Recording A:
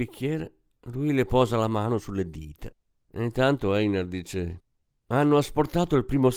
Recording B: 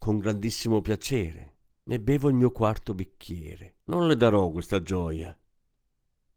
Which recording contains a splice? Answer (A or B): B